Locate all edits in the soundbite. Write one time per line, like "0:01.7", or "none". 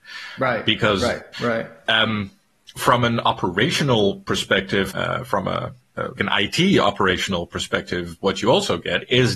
0:01.3
0:04.9
0:06.2